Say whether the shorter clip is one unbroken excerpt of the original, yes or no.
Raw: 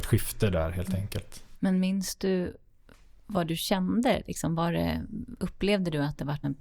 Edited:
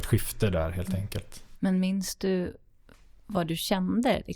yes